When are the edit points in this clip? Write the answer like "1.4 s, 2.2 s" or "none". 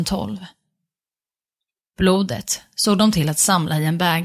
1.8 s